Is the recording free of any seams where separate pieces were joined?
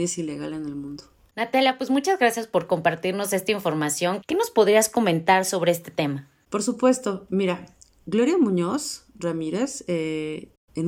no; 1 cut; at 4.2 s

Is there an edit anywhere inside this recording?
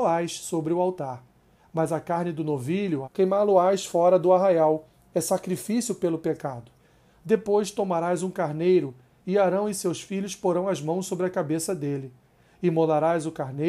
yes; 1 cut; at 3.0 s

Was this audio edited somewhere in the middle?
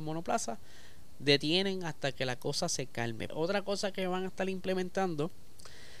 yes; 1 cut; at 3.3 s

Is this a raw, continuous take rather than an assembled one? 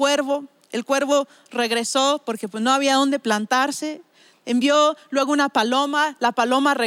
yes; 0 cuts

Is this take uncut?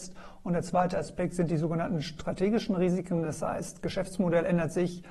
yes; 0 cuts

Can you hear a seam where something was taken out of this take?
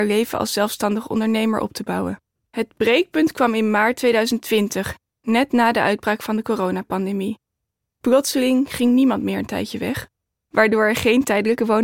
yes; 1 cut; at 2.5 s

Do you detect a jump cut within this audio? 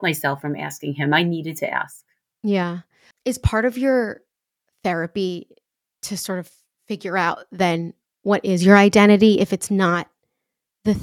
no; 0 cuts

